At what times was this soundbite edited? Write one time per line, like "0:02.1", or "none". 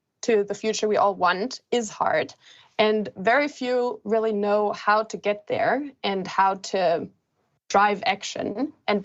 none